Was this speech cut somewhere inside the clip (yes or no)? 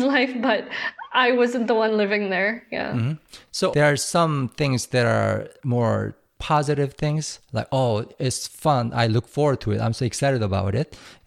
yes